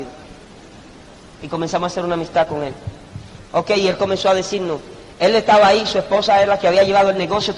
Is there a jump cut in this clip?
no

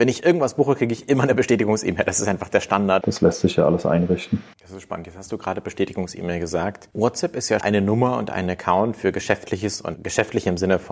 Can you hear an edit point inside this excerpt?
yes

